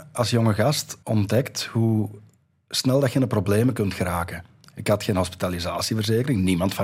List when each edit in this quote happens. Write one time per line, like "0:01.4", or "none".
0:01.0